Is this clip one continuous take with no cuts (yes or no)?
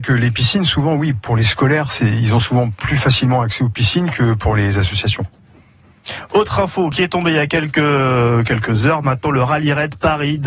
yes